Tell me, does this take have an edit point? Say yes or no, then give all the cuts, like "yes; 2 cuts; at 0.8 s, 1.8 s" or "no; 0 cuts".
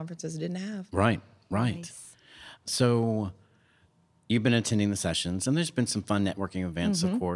no; 0 cuts